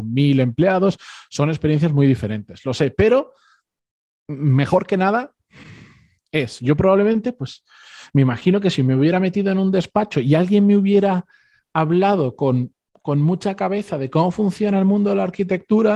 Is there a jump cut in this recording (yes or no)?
no